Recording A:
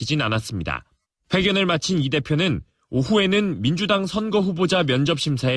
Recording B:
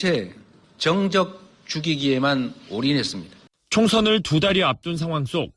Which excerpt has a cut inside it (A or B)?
B